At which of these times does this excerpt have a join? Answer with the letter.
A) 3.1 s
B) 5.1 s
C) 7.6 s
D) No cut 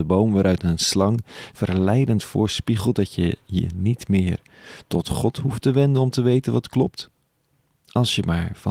D